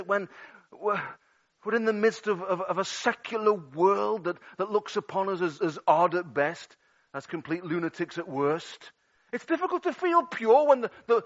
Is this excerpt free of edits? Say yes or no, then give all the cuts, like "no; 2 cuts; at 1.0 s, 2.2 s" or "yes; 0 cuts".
yes; 0 cuts